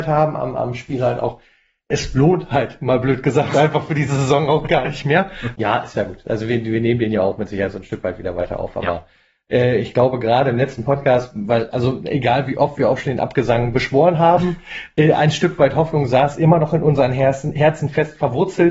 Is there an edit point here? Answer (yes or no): yes